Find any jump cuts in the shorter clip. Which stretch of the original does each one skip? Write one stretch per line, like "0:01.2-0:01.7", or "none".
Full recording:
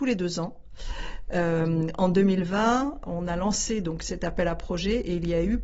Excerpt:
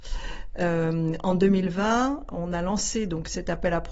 none